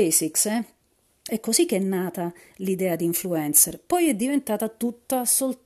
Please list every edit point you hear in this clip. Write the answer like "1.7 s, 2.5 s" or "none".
1.3 s